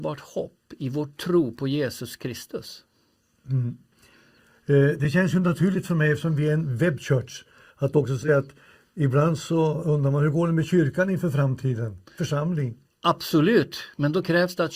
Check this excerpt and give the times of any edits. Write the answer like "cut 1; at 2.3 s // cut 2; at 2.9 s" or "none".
cut 1; at 12.1 s